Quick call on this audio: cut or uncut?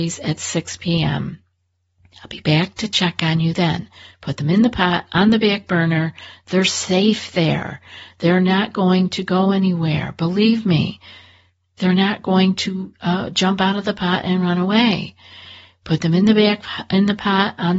uncut